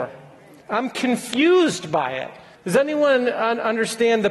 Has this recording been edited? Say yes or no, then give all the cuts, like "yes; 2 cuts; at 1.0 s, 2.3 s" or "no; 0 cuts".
yes; 1 cut; at 2.5 s